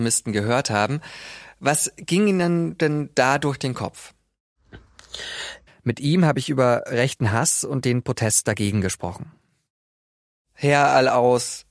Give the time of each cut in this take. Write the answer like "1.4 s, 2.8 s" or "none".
5.7 s